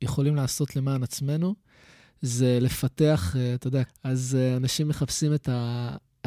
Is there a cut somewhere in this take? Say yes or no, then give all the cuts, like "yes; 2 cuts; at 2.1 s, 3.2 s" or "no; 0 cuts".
yes; 1 cut; at 3.8 s